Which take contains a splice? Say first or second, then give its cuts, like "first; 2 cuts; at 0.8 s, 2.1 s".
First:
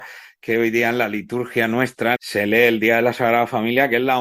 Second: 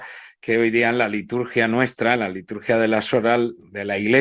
first; 1 cut; at 2.2 s